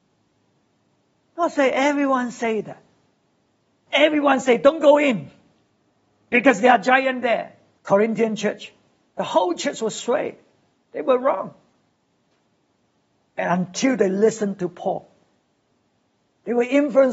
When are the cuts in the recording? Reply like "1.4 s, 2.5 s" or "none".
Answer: 1.2 s, 3.9 s, 7.8 s